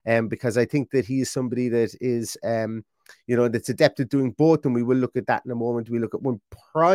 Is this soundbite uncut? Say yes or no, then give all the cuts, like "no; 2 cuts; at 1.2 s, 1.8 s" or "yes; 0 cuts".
yes; 0 cuts